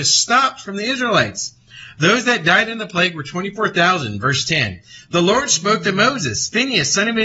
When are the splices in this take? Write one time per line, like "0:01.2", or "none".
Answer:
none